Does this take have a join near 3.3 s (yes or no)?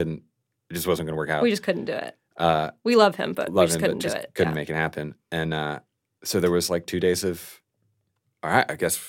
no